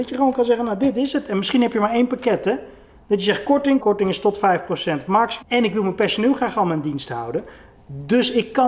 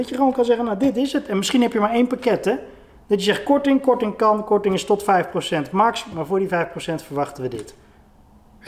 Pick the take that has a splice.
first; 2 cuts; at 3.8 s, 5.4 s

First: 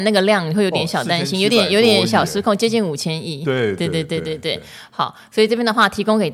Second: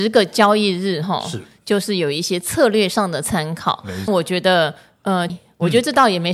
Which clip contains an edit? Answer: second; 2 cuts; at 4.1 s, 5.3 s

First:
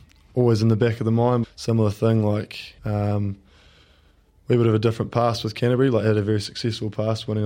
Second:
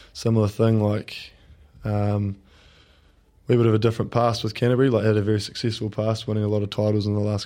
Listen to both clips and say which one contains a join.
first; 2 cuts; at 1.4 s, 2.8 s

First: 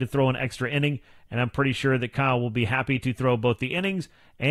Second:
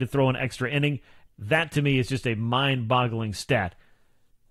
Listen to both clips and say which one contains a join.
second; 1 cut; at 1.3 s

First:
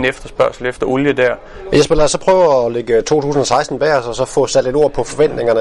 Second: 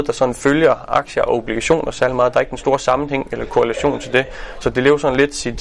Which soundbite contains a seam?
first; 1 cut; at 1.7 s

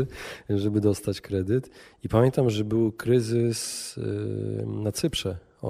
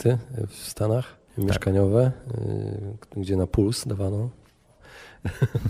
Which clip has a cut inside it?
second; 1 cut; at 1.3 s

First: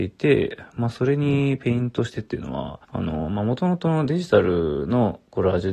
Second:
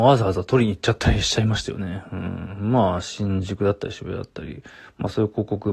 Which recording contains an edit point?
first; 1 cut; at 2.8 s

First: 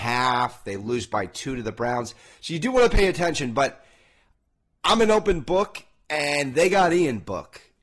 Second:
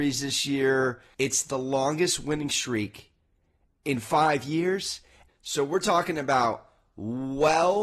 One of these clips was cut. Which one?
second; 2 cuts; at 1.1 s, 5.3 s

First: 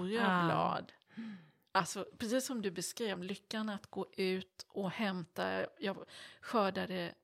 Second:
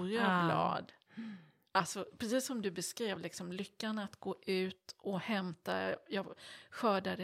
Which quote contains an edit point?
first; 1 cut; at 3.2 s

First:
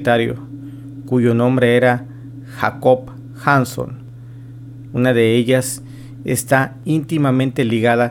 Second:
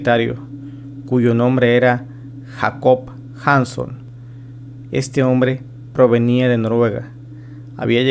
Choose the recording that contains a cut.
first; 1 cut; at 4.9 s

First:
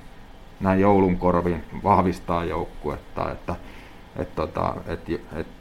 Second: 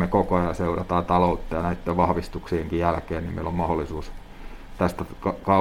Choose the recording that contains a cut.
first; 1 cut; at 3.3 s

